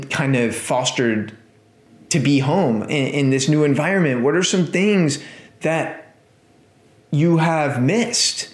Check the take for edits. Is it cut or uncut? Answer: uncut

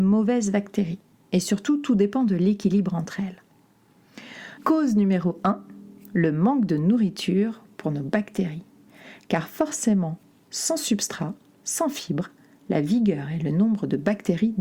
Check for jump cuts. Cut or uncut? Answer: cut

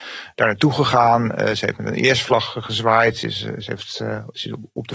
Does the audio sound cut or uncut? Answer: uncut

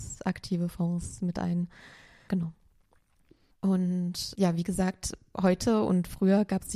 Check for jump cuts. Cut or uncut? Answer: uncut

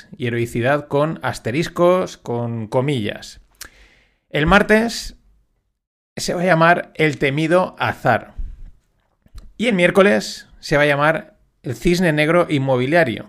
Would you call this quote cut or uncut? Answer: uncut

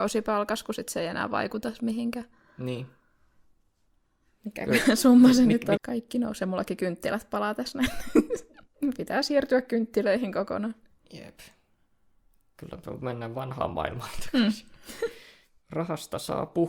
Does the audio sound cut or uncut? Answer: cut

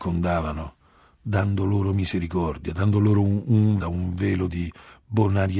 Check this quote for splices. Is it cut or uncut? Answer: cut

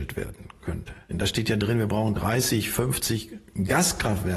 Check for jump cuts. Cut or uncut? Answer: cut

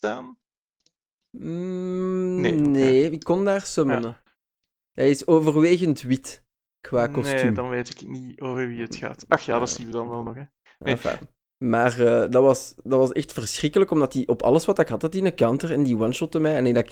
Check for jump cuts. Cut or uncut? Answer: uncut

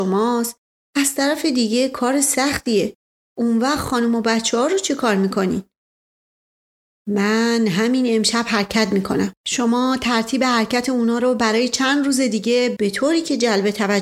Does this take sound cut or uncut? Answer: uncut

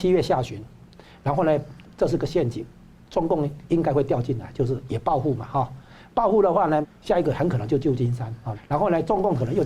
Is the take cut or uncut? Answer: cut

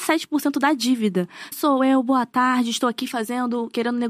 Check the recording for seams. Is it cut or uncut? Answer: cut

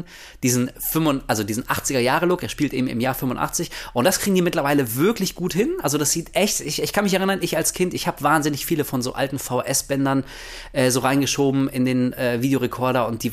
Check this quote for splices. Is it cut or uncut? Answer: uncut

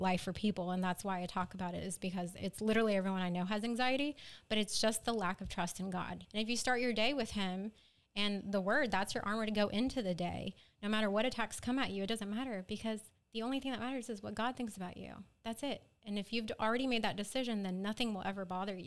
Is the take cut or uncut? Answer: cut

